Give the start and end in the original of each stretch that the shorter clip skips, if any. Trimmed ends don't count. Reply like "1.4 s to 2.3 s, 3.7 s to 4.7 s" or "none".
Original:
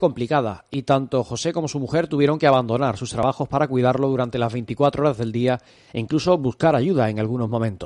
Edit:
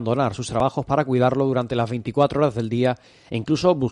none